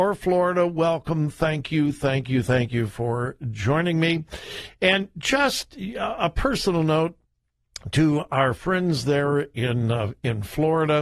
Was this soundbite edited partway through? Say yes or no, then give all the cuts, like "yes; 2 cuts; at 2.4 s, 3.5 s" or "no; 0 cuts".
no; 0 cuts